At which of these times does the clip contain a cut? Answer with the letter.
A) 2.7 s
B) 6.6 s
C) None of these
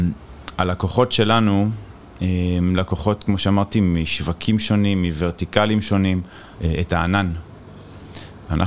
B